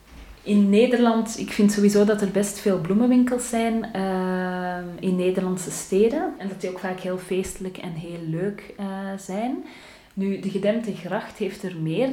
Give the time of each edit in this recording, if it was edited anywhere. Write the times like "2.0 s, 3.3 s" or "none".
6.4 s